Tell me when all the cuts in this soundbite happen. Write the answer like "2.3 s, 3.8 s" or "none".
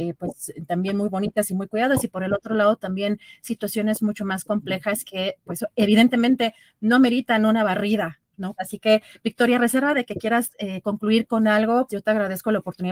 8.6 s, 11.9 s